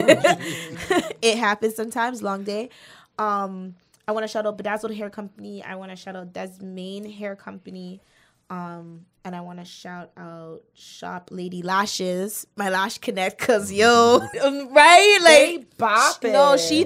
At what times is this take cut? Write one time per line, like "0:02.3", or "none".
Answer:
0:14.3